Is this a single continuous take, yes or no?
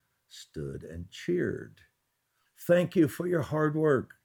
no